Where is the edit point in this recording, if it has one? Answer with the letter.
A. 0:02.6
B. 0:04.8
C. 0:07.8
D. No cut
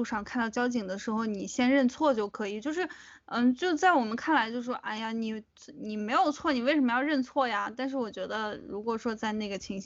D